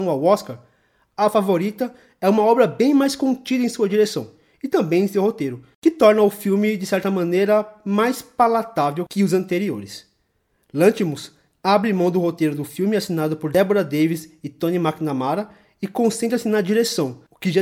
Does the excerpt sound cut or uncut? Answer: uncut